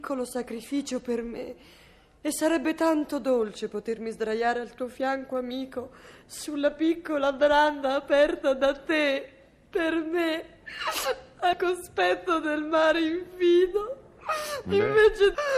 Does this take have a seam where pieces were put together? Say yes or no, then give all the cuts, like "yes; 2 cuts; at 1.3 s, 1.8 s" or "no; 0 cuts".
no; 0 cuts